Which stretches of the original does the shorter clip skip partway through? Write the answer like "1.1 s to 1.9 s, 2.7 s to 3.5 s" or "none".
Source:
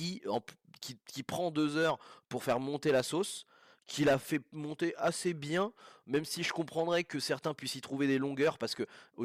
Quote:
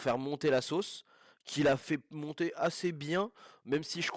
none

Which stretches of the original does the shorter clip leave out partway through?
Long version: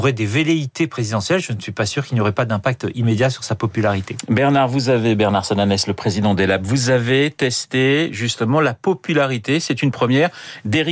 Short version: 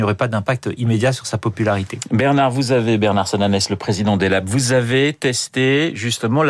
none

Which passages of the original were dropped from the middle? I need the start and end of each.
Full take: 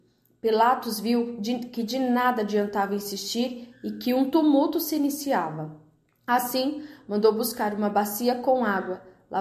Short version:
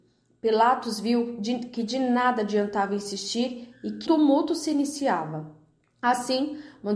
4.1 s to 4.3 s

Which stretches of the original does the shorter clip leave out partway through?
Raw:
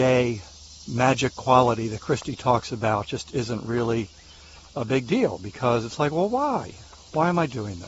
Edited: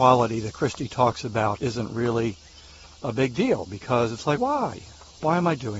3.1 s to 3.3 s, 6.1 s to 6.3 s

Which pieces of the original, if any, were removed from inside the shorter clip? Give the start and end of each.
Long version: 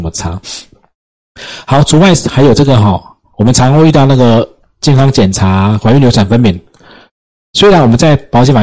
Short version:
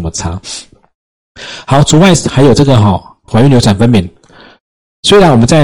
3.3 s to 5.8 s

